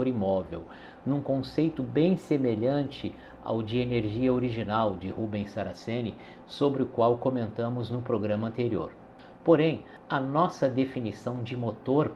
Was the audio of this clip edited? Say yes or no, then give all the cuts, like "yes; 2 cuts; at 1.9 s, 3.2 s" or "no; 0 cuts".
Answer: no; 0 cuts